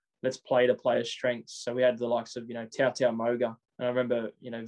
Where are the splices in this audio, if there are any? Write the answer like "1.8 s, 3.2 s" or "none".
none